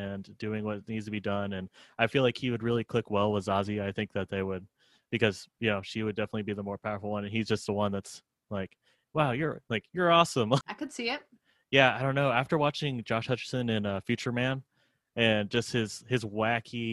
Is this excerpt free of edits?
no; 1 cut; at 10.6 s

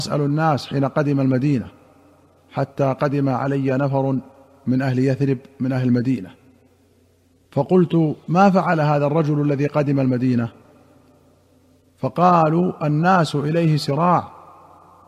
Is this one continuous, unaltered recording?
yes; 0 cuts

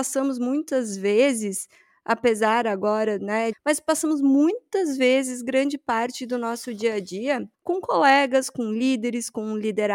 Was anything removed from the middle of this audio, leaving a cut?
yes; 2 cuts; at 3.5 s, 7.5 s

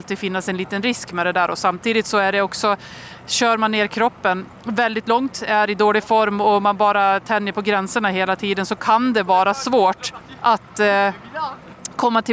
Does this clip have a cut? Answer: no; 0 cuts

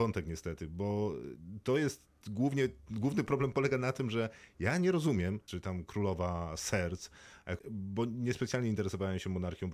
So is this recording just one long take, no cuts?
no; 2 cuts; at 5.5 s, 7.6 s

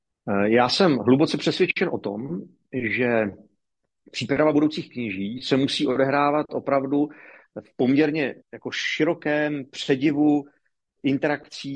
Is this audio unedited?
no; 1 cut; at 8.4 s

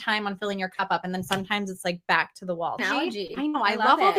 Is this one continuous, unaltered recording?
no; 1 cut; at 2.8 s

